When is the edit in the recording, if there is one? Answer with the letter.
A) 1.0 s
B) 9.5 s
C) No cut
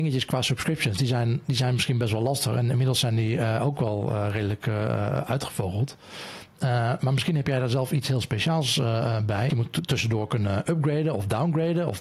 B